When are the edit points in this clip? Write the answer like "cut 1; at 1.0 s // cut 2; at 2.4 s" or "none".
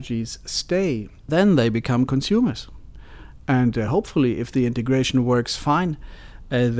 none